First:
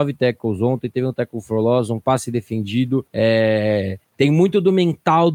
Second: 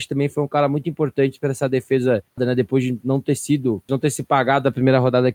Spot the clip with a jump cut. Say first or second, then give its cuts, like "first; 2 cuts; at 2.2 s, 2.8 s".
second; 2 cuts; at 2.4 s, 3.9 s